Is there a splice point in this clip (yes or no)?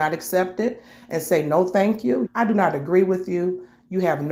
yes